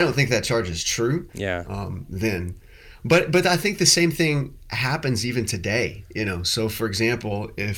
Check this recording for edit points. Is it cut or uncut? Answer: cut